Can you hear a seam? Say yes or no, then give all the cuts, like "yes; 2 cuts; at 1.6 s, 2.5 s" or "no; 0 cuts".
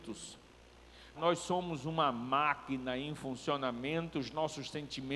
yes; 1 cut; at 1.2 s